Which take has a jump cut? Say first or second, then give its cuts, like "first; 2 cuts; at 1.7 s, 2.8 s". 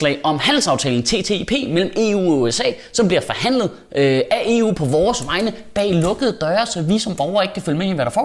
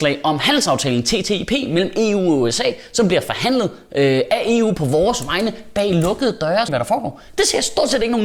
second; 1 cut; at 6.7 s